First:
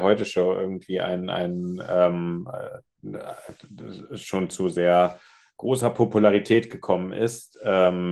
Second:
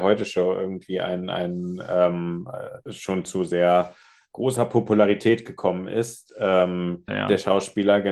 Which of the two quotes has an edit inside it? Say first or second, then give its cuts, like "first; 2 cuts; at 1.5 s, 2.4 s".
second; 2 cuts; at 2.9 s, 7.1 s